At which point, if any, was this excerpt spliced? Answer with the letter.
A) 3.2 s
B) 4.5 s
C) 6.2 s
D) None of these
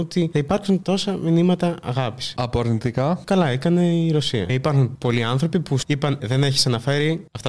C